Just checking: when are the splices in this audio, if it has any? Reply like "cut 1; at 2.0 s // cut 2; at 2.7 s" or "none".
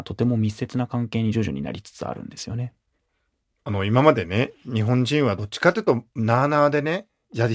none

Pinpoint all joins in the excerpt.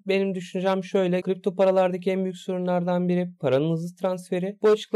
cut 1; at 1.2 s

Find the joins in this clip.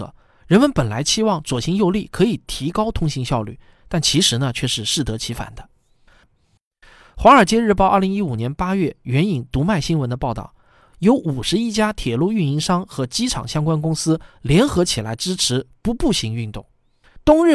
cut 1; at 6.2 s

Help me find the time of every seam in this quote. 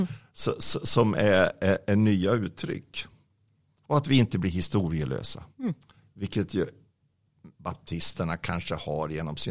cut 1; at 5.5 s // cut 2; at 7.5 s

